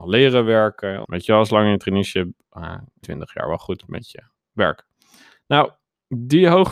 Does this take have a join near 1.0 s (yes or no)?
yes